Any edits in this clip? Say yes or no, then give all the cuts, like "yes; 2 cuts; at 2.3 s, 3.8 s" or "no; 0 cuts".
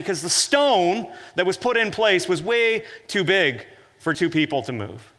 yes; 1 cut; at 4.1 s